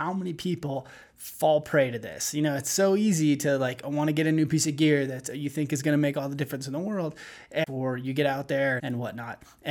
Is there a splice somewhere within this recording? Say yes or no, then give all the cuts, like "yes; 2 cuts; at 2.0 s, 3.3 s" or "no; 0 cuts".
yes; 2 cuts; at 7.7 s, 8.8 s